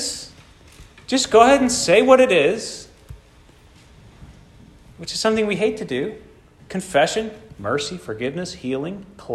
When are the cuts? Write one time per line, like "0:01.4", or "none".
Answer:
0:06.7